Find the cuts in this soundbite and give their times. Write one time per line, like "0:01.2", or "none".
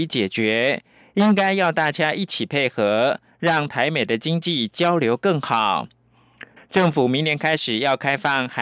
0:06.6